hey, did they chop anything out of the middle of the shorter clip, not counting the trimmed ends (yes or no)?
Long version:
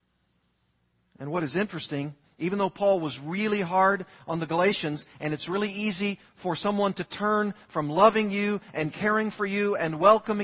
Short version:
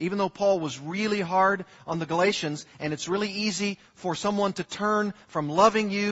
no